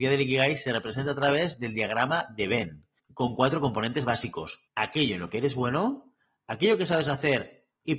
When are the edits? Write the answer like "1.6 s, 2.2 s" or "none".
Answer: 4.7 s